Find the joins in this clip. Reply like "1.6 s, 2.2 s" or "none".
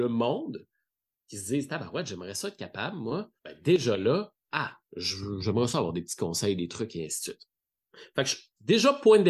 3.4 s, 4.9 s